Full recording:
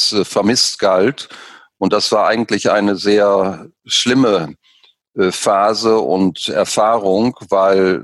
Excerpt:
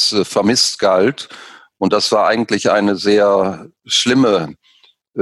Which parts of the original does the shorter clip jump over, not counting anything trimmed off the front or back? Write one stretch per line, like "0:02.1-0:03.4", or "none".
none